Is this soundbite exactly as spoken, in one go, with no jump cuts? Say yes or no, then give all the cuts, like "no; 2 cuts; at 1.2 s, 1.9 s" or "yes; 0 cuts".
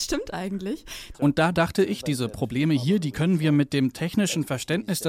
no; 1 cut; at 1.1 s